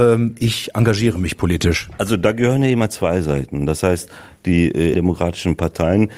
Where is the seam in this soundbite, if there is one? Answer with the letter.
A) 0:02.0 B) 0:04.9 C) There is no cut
B